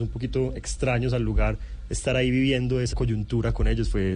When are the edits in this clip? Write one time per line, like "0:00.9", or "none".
0:02.9